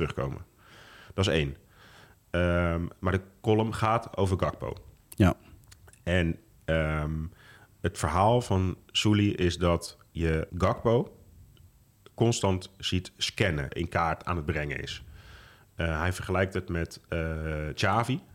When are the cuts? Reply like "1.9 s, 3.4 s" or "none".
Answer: 10.5 s, 13.7 s